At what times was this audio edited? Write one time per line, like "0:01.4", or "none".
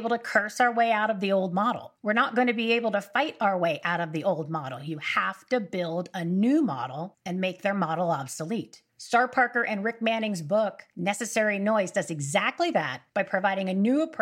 none